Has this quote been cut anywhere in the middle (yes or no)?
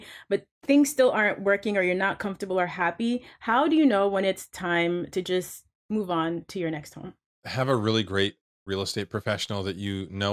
no